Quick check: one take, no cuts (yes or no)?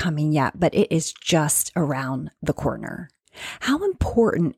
yes